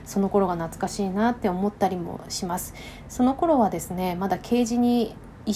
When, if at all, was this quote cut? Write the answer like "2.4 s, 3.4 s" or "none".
none